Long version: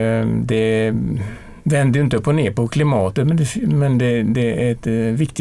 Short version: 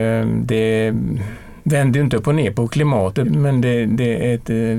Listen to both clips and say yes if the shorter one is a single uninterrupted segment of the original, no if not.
no